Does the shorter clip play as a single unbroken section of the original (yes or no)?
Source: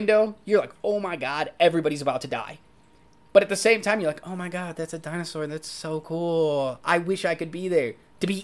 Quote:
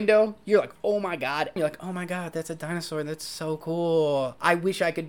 no